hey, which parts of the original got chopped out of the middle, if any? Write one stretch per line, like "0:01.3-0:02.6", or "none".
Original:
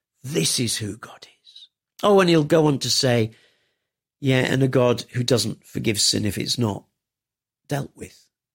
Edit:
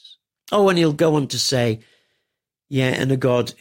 none